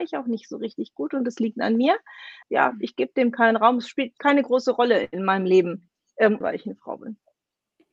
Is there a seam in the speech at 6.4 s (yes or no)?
yes